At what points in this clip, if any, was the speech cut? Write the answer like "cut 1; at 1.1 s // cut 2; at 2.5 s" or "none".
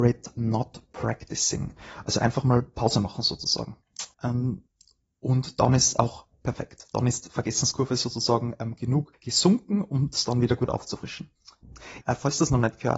cut 1; at 4.1 s // cut 2; at 12.0 s